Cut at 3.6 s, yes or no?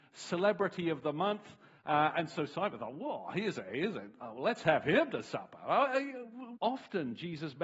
no